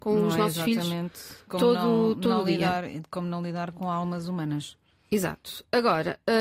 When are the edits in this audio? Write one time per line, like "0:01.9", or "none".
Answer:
none